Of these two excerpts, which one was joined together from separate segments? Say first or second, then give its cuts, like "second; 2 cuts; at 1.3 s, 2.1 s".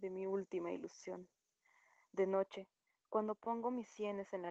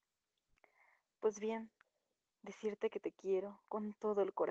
second; 1 cut; at 2.3 s